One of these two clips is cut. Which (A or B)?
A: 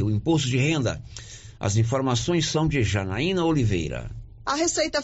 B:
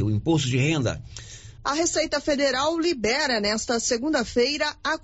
B